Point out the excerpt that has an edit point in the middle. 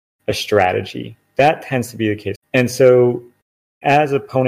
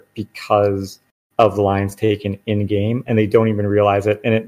first; 1 cut; at 2.4 s

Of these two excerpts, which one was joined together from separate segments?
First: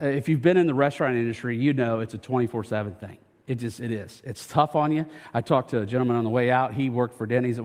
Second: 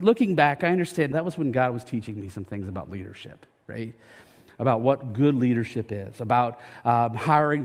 second; 1 cut; at 1.1 s

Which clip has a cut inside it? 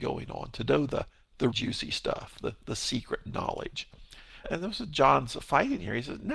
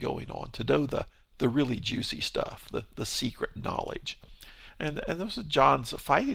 first; 2 cuts; at 1.5 s, 4.4 s

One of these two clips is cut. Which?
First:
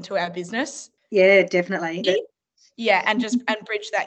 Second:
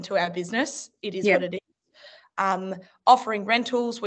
first; 2 cuts; at 1.0 s, 2.0 s

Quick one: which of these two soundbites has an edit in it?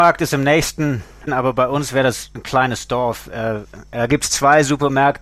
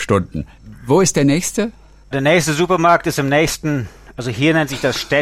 first; 1 cut; at 1.3 s

